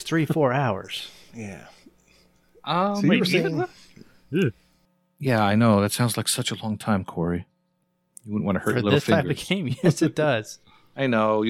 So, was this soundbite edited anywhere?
no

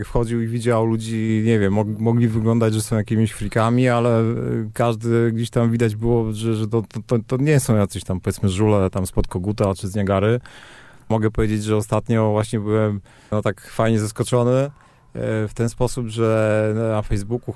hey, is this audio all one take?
yes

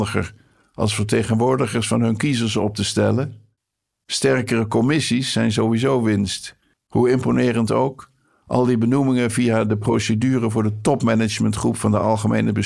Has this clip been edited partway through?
yes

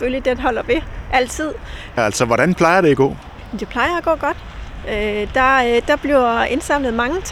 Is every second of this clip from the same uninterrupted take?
no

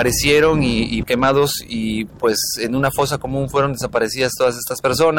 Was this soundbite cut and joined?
yes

